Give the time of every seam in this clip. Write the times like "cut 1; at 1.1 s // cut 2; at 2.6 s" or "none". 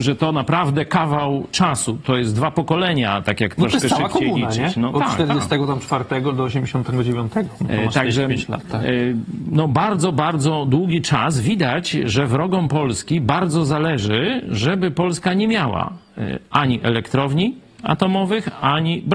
none